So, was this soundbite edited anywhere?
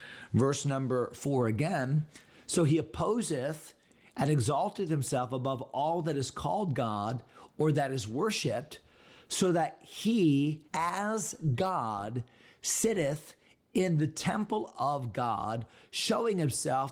yes; 1 cut; at 10.7 s

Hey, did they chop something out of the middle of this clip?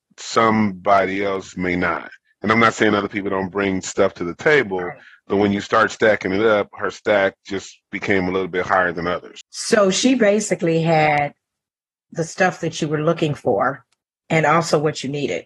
no; 0 cuts

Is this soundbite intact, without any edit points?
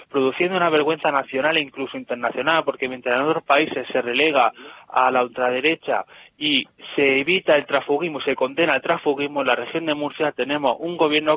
yes; 0 cuts

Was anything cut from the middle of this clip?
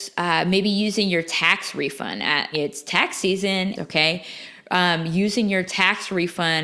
yes; 2 cuts; at 2.5 s, 3.7 s

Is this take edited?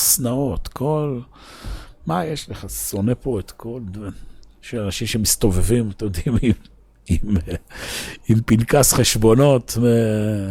no; 0 cuts

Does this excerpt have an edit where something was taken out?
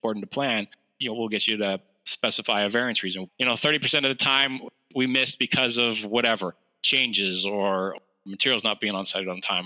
yes; 1 cut; at 3.3 s

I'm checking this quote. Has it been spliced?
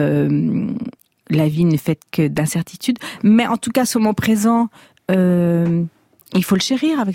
no; 0 cuts

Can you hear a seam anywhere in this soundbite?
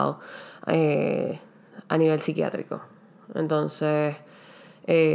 no; 0 cuts

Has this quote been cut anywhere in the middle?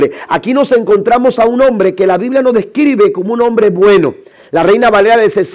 no; 0 cuts

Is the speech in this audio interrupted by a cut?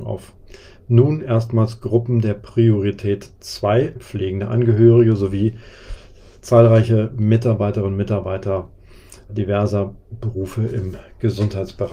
yes; 2 cuts; at 4.0 s, 9.3 s

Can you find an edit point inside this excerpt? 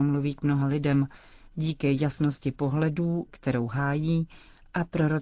yes; 1 cut; at 3.3 s

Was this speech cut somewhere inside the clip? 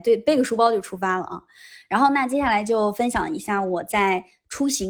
no; 0 cuts

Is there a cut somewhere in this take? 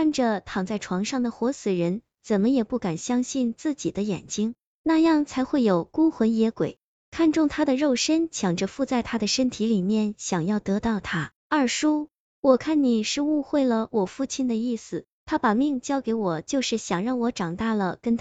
yes; 2 cuts; at 4.7 s, 11.3 s

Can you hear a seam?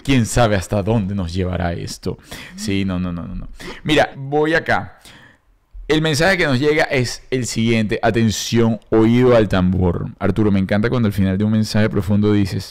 yes; 1 cut; at 4.1 s

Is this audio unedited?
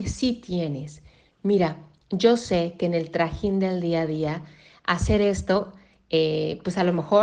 yes; 0 cuts

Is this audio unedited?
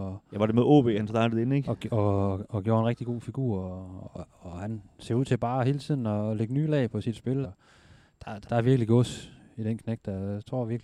no; 2 cuts; at 7.4 s, 8.4 s

